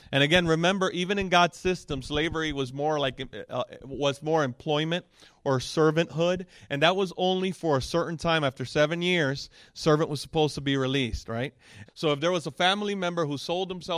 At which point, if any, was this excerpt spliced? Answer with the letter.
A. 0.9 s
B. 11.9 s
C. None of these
B